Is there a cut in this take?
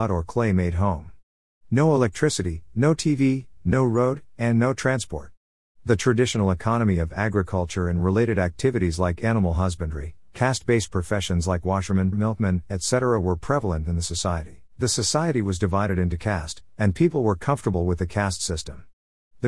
yes; 2 cuts; at 12.1 s, 14.7 s

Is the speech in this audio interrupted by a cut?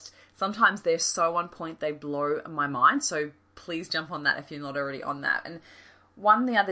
no; 0 cuts

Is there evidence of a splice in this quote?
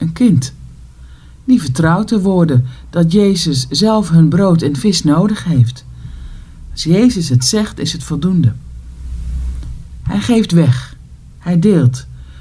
no; 0 cuts

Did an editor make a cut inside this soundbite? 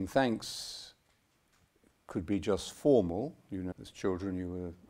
yes; 1 cut; at 3.7 s

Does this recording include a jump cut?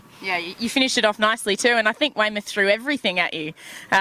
no; 0 cuts

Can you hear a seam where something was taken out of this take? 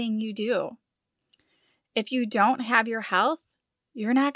no; 0 cuts

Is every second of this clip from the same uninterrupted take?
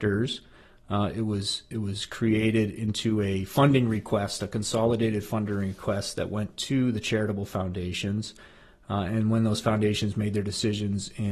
yes; 0 cuts

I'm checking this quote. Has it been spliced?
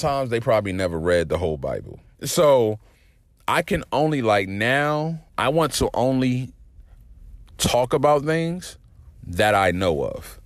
yes; 3 cuts; at 2.1 s, 5.3 s, 9.1 s

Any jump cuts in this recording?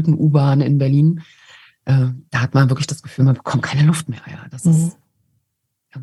no; 0 cuts

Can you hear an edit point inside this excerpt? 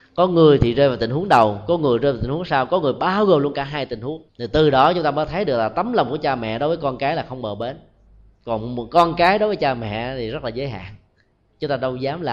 yes; 1 cut; at 4.3 s

